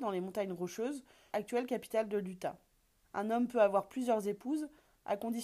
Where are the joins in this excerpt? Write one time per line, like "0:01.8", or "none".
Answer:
0:01.3
0:03.0